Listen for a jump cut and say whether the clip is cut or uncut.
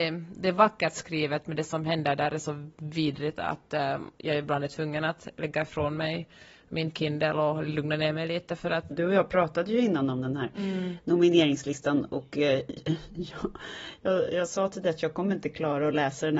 cut